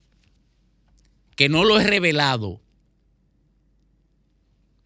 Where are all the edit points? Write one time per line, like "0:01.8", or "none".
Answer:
none